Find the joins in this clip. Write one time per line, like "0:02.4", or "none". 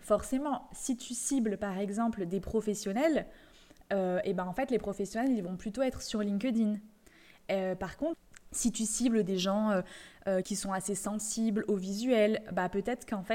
0:10.4